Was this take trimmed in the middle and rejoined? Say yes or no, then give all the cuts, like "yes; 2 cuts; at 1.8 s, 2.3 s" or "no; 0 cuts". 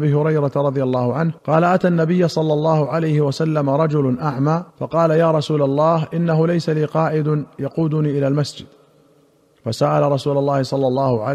yes; 2 cuts; at 1.4 s, 4.7 s